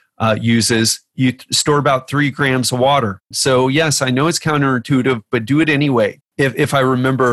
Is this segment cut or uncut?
cut